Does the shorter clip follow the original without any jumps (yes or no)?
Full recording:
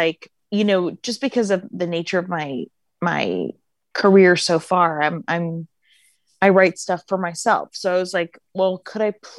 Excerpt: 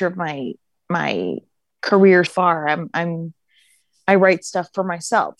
no